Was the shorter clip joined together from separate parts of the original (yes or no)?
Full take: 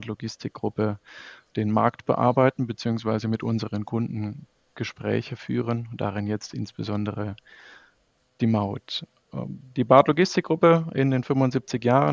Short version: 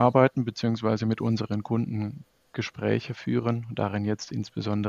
no